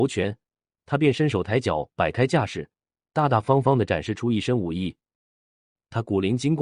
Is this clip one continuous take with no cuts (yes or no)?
yes